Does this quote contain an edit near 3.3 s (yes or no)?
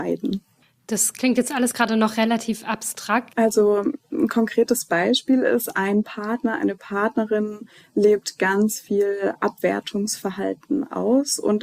yes